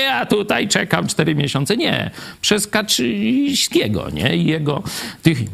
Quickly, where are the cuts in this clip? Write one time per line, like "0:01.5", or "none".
none